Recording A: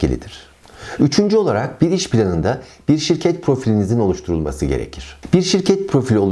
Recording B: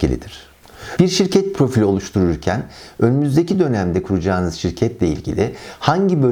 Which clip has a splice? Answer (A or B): B